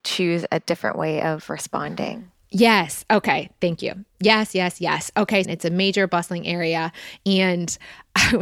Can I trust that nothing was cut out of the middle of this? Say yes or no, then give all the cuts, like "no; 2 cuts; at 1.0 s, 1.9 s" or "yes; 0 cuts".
no; 1 cut; at 5.4 s